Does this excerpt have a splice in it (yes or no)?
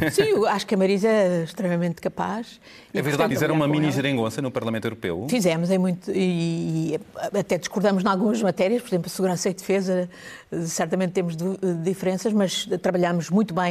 yes